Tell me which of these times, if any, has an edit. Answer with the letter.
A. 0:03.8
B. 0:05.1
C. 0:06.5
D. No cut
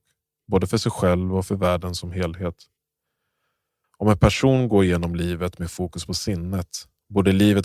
A